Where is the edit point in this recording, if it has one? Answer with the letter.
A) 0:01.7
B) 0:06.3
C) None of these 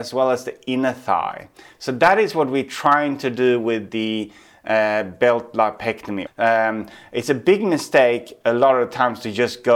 B